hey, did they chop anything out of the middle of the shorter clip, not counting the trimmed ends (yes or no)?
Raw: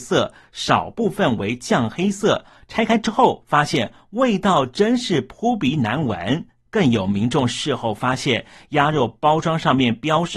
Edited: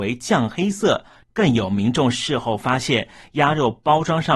yes